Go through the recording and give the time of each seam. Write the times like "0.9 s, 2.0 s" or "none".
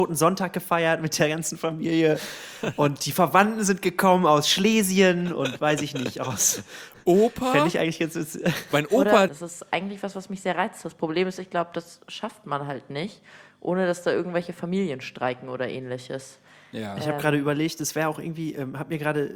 9.3 s